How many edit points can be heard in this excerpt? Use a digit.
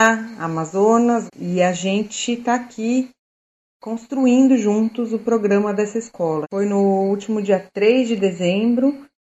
2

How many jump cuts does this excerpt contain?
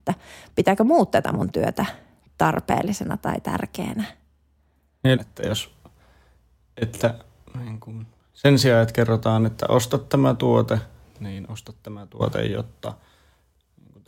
1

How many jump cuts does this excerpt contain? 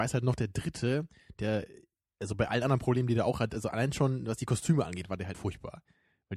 1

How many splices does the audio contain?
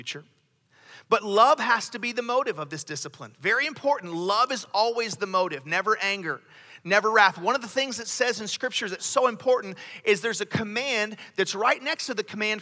0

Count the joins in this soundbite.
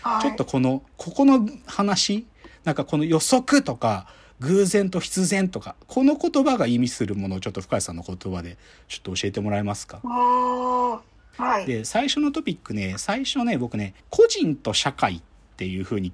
2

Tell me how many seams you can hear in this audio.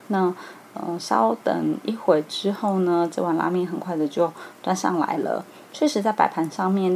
0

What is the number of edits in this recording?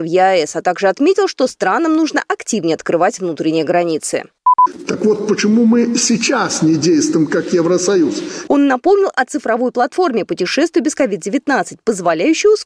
1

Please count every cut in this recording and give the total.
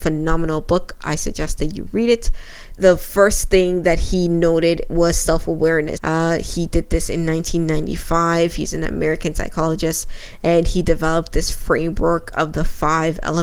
2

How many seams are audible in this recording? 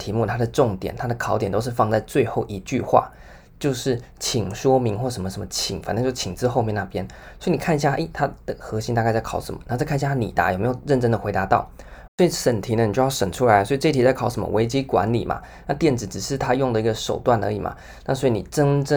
1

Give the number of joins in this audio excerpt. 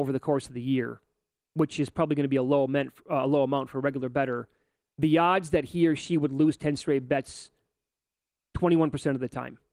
0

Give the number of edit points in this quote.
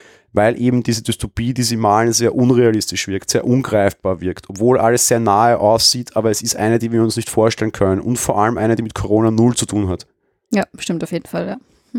0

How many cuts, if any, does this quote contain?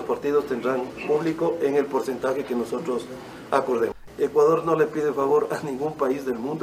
1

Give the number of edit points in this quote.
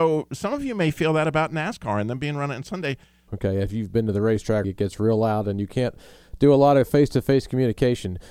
2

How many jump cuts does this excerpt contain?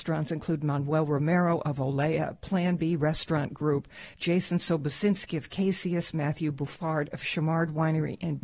0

